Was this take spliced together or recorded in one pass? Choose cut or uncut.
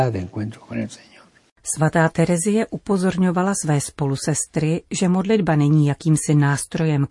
uncut